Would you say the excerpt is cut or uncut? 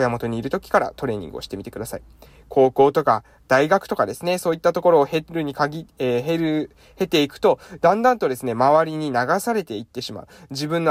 uncut